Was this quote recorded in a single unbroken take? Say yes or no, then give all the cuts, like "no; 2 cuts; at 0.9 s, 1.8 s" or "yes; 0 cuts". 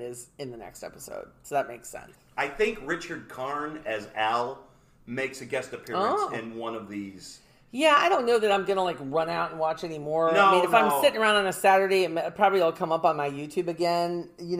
yes; 0 cuts